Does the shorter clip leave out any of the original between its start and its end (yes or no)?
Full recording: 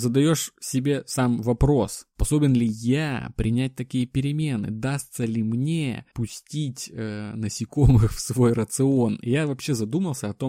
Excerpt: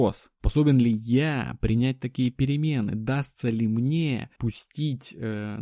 no